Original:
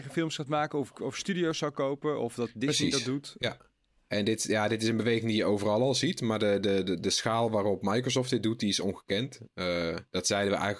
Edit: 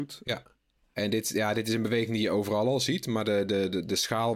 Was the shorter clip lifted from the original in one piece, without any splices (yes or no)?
yes